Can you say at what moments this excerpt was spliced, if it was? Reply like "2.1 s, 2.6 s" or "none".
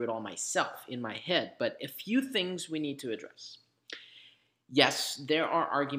none